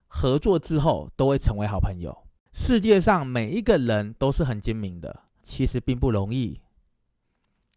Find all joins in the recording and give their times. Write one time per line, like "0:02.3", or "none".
0:02.4
0:05.4